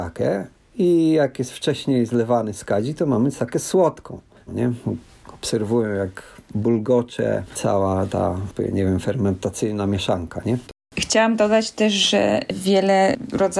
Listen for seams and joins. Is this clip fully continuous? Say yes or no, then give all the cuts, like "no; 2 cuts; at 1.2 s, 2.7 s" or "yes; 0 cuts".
no; 2 cuts; at 4.5 s, 10.6 s